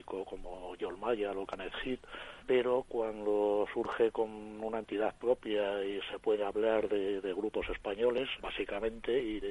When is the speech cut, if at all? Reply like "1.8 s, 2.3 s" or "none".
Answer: 2.4 s, 8.4 s